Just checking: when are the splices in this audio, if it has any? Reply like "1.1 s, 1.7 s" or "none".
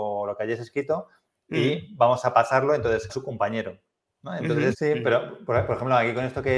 3.1 s, 4.7 s